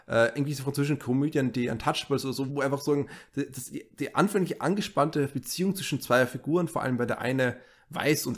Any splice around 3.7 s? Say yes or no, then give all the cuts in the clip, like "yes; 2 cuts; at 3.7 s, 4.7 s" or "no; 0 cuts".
no; 1 cut; at 2.5 s